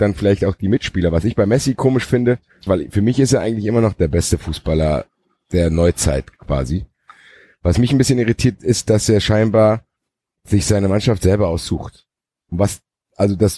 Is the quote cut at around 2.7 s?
yes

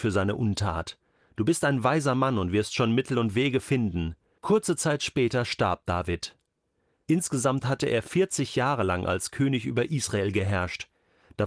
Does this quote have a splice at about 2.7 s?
no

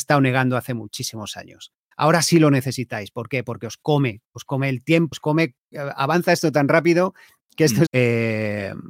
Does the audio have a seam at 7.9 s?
yes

